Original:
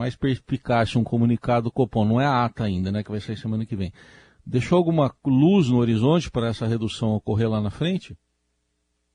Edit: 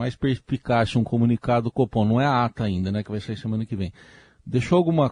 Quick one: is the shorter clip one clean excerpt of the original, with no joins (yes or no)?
yes